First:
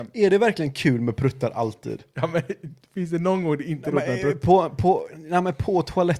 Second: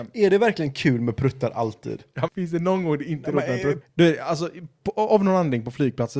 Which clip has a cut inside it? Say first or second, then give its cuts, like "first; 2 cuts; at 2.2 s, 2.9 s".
second; 2 cuts; at 2.3 s, 3.8 s